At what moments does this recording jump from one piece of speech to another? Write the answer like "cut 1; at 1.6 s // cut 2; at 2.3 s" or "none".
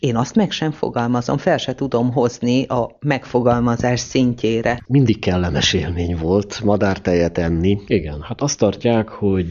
cut 1; at 4.8 s // cut 2; at 7.9 s

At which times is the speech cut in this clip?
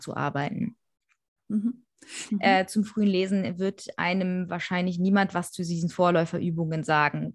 cut 1; at 2.3 s

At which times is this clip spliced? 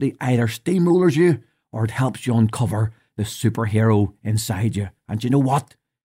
none

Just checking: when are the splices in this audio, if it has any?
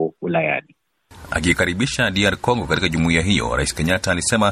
cut 1; at 1.3 s

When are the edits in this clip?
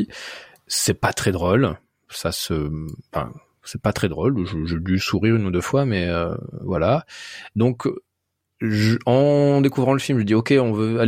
none

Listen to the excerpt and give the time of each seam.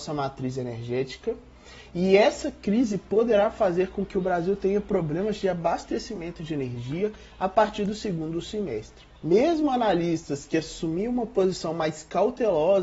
cut 1; at 9.2 s

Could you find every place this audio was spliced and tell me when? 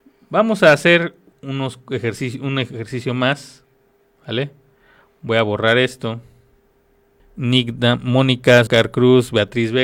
cut 1; at 1.3 s // cut 2; at 7.2 s // cut 3; at 8.7 s

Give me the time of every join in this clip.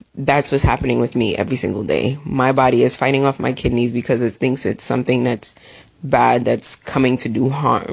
none

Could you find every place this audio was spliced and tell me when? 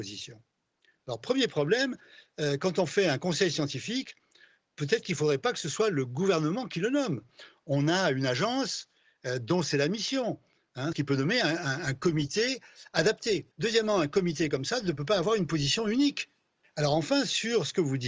cut 1; at 10.9 s // cut 2; at 13.5 s // cut 3; at 16.6 s

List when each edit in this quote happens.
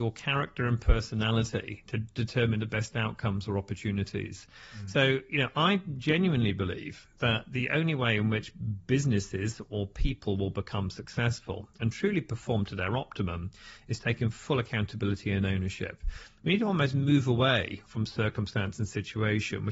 none

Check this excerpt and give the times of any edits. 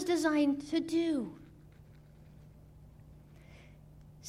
none

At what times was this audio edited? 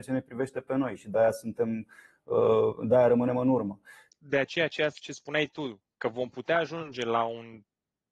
cut 1; at 4.1 s

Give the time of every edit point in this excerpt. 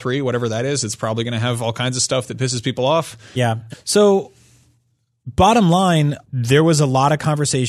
cut 1; at 3.7 s // cut 2; at 6.2 s

